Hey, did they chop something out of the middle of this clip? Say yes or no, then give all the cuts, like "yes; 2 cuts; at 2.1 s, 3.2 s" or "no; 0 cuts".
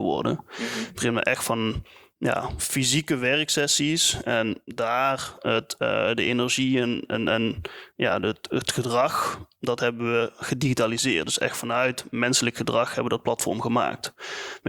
no; 0 cuts